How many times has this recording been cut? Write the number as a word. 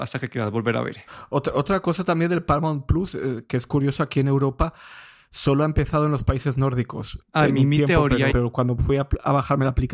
two